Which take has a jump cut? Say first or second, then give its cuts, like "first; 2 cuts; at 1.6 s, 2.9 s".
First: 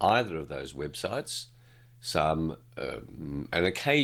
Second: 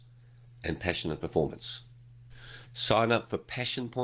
second; 1 cut; at 2.7 s